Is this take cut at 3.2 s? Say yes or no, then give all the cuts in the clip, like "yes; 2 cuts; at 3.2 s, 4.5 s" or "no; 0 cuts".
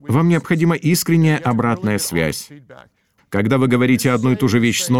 yes; 1 cut; at 3.2 s